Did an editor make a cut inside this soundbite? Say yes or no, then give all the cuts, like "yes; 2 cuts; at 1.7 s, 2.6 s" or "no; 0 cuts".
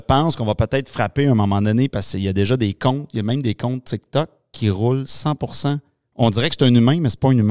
no; 0 cuts